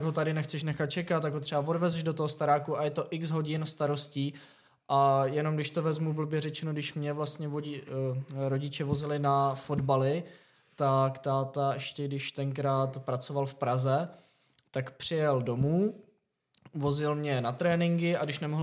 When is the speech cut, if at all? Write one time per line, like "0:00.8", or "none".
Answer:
none